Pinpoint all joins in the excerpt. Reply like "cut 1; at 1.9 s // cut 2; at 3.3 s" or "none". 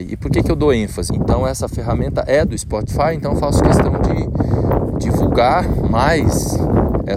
cut 1; at 1.1 s